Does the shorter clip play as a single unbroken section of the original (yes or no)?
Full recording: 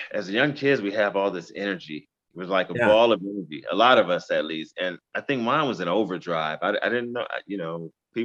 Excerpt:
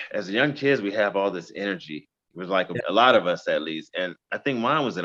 no